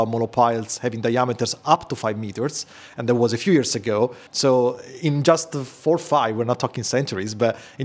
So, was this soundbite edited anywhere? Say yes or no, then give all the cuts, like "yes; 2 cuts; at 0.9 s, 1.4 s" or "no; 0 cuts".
yes; 1 cut; at 4.3 s